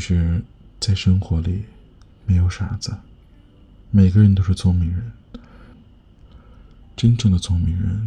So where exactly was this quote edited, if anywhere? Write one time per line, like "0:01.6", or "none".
0:05.7